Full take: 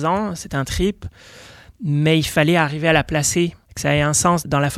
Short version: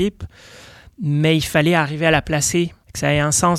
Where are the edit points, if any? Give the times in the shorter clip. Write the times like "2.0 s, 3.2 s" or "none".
none